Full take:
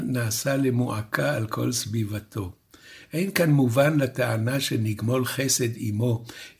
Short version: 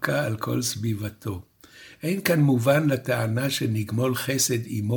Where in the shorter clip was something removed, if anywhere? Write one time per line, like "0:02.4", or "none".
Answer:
none